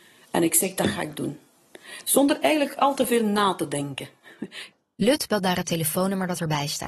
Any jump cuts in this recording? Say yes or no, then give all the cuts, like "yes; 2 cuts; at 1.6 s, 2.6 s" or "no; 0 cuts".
no; 0 cuts